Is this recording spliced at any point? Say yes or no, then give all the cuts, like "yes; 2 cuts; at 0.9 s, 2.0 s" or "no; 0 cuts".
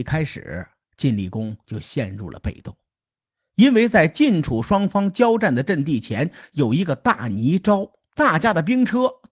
yes; 1 cut; at 8.1 s